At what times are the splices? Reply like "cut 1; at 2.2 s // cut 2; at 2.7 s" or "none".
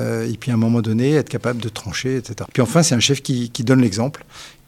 cut 1; at 2.5 s